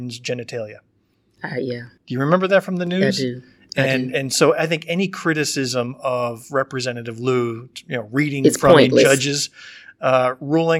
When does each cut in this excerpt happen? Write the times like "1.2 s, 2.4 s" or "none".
none